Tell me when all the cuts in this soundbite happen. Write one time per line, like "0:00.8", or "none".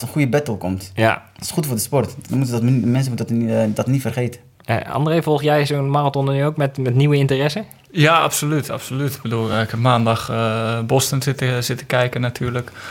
none